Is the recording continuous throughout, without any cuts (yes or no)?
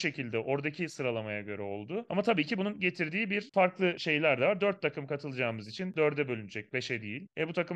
no